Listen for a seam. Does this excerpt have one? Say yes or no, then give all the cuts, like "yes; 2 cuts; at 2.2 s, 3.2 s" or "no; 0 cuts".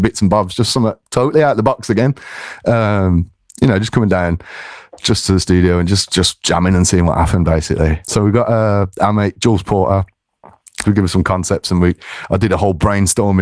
yes; 2 cuts; at 8.0 s, 10.8 s